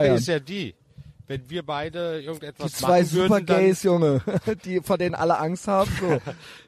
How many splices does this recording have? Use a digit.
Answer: 0